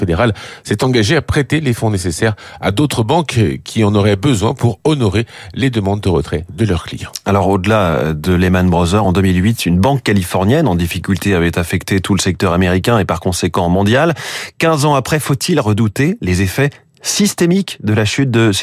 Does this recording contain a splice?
no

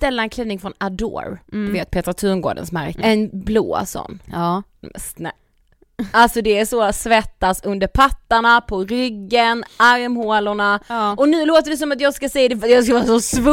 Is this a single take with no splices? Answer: no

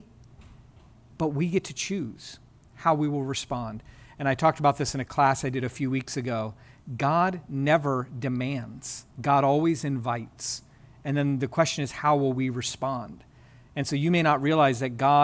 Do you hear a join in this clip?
yes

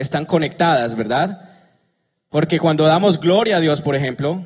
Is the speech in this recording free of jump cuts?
yes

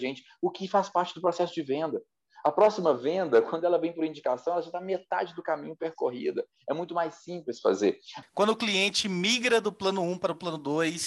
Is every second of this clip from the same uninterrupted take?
no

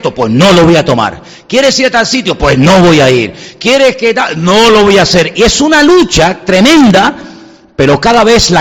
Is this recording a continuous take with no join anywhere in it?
yes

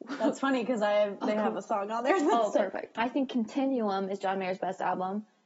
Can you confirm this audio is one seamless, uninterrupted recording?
no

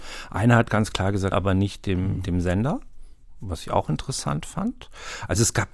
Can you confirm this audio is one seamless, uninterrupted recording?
no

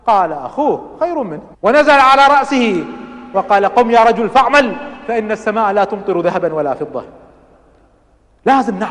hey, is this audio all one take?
no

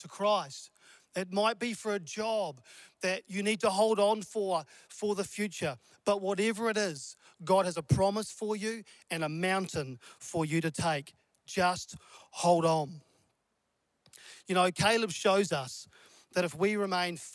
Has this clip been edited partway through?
no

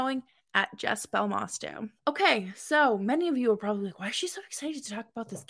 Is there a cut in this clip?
yes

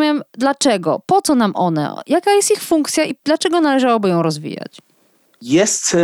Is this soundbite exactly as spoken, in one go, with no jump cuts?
yes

